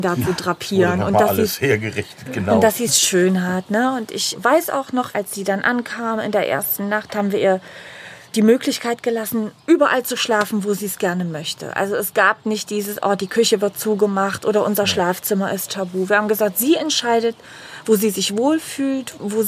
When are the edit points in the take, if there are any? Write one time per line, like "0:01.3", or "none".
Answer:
none